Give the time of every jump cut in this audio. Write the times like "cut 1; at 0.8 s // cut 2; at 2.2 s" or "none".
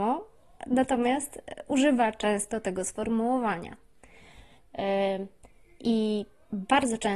cut 1; at 4.6 s